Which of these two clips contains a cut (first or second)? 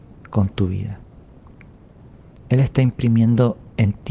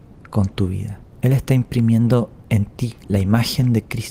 second